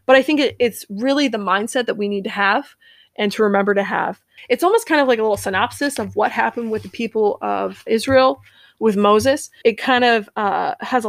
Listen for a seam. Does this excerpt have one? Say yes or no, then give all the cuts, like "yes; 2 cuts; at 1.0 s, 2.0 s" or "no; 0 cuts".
yes; 3 cuts; at 4.4 s, 7.9 s, 9.6 s